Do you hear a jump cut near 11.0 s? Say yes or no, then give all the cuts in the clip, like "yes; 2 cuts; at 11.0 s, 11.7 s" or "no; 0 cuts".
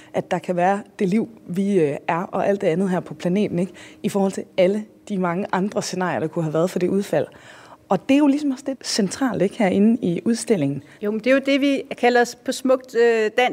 yes; 2 cuts; at 8.7 s, 11.0 s